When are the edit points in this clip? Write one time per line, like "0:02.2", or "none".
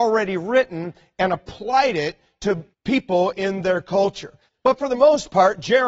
0:02.7
0:04.5